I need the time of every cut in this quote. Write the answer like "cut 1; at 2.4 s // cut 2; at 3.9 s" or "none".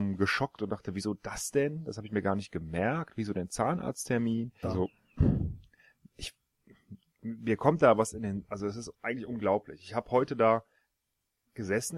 cut 1; at 4.6 s